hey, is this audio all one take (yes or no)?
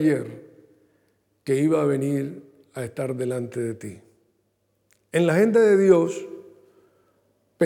yes